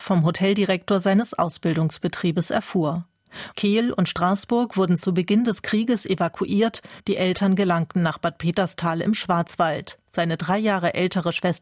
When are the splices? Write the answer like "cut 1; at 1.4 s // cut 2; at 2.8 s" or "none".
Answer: cut 1; at 3.5 s // cut 2; at 7.0 s